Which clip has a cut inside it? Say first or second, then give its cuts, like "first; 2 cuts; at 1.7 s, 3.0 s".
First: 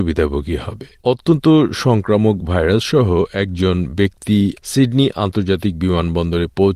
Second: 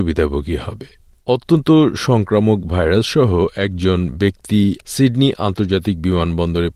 first; 1 cut; at 1.0 s